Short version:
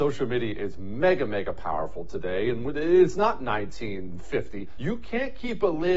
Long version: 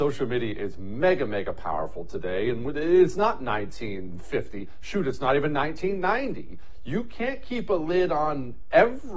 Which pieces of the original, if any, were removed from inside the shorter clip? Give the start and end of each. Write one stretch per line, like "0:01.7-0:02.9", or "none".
0:04.8-0:06.8